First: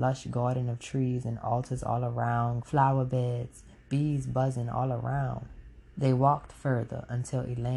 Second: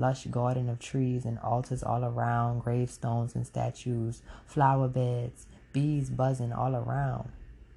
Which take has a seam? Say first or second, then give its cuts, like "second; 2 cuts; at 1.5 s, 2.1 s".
first; 2 cuts; at 2.6 s, 5.9 s